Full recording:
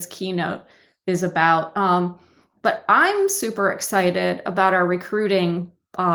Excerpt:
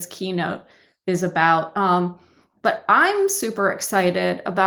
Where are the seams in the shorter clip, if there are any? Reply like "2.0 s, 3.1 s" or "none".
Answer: none